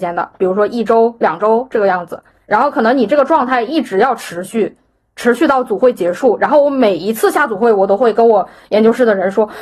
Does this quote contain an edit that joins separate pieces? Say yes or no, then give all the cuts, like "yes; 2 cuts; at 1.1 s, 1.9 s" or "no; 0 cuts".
no; 0 cuts